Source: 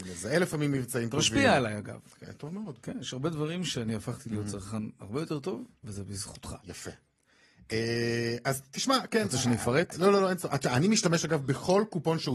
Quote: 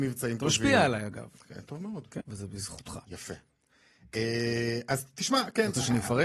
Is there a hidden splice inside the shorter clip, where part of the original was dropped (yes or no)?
yes